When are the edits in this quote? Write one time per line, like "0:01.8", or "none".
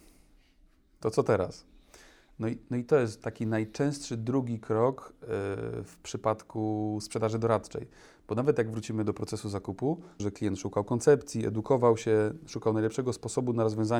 0:10.2